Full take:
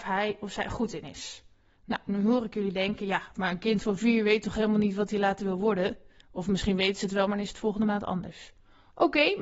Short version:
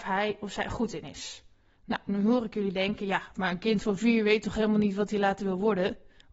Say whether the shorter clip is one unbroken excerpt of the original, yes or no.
yes